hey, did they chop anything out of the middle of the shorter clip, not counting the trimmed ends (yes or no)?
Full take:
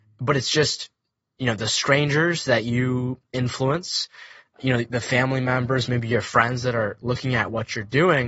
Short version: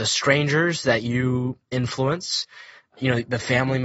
no